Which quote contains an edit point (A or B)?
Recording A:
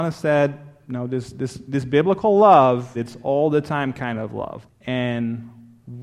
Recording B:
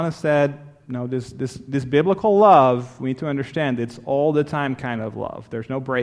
A